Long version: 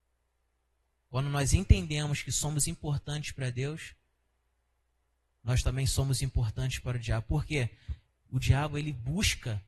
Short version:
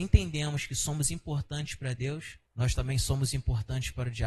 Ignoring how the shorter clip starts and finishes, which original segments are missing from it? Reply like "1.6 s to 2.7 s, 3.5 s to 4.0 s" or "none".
4.0 s to 5.3 s

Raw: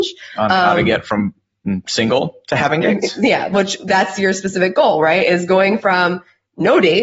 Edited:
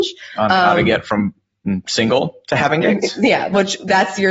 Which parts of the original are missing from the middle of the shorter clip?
none

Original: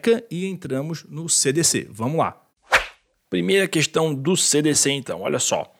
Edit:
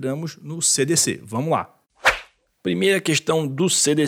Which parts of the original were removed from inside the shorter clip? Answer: none

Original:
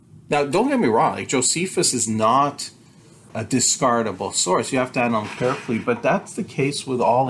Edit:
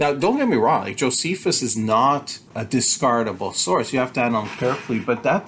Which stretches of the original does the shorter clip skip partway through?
2.8 s to 3.3 s

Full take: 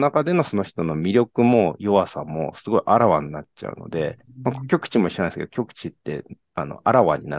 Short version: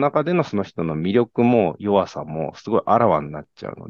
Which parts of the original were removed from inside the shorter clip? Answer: none

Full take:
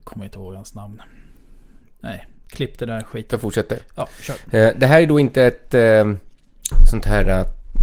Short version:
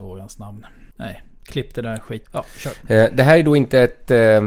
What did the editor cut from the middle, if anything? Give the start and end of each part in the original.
1.3 s to 1.9 s, 3.3 s to 3.9 s

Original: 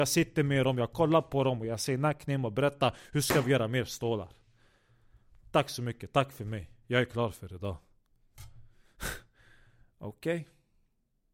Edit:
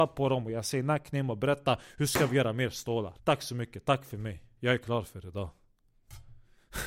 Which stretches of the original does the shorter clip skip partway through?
4.3 s to 5.4 s

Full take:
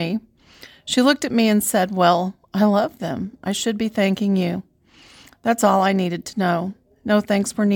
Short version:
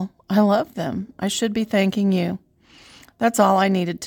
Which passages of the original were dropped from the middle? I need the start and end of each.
none

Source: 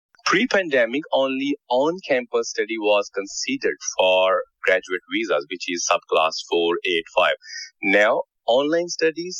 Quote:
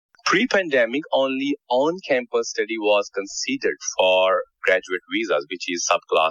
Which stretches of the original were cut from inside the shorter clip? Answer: none

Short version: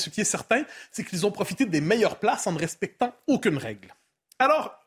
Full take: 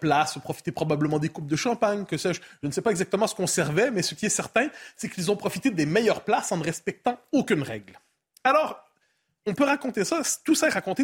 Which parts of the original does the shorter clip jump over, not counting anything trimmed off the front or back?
none

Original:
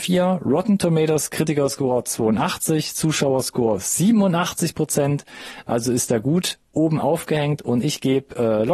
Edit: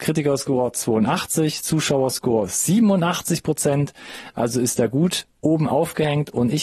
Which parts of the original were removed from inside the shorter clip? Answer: none

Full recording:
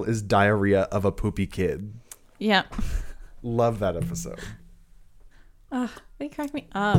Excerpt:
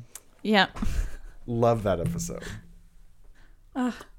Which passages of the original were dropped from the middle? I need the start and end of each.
none

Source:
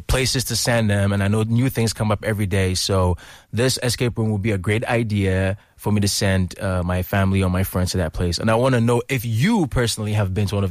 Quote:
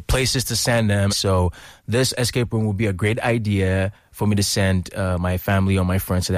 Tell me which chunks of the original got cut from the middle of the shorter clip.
1.1 s to 2.7 s

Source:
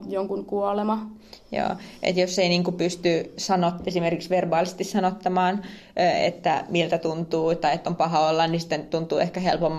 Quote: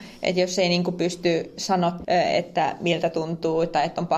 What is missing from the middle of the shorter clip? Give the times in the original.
3.8 s to 5.9 s

